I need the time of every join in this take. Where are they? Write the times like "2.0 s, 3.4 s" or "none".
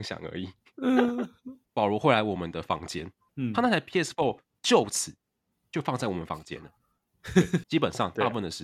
1.6 s, 7.6 s